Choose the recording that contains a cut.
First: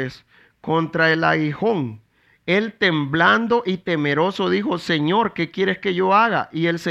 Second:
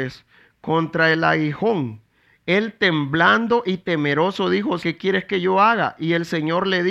second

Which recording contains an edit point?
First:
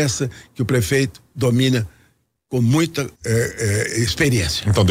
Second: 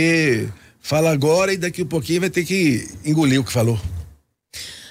first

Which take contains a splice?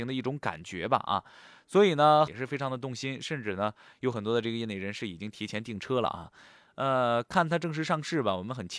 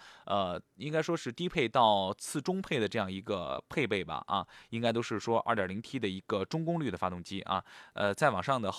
first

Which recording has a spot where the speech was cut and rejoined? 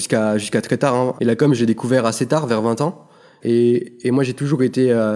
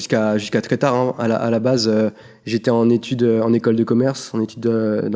first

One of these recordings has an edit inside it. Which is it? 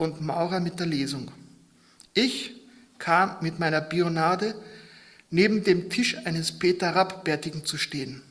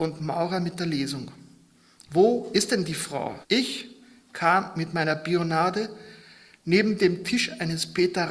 second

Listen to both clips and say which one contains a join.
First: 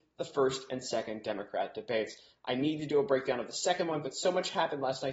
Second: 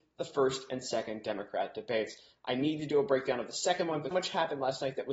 second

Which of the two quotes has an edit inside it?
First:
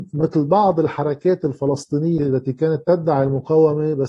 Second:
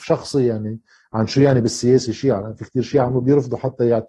first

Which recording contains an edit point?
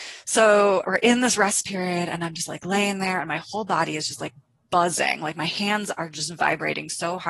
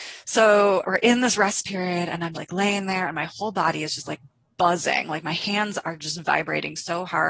second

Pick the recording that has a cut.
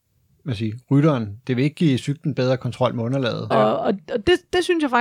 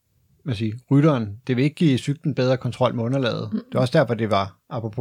first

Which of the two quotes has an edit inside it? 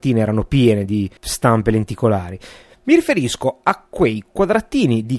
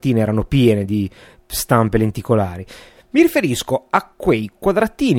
first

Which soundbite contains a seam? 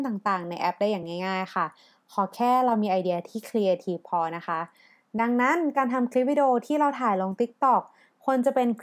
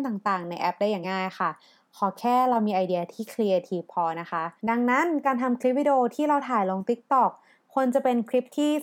second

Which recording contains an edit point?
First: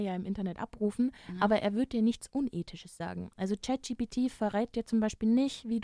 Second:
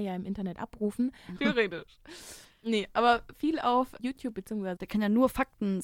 second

